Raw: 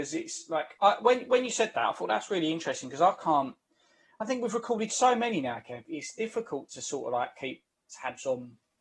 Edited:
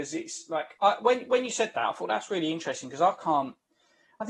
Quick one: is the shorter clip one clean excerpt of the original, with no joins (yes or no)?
yes